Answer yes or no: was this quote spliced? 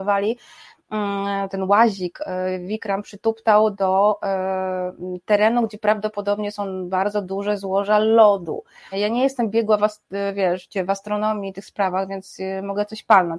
yes